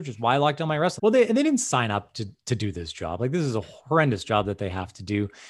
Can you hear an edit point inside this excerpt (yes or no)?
yes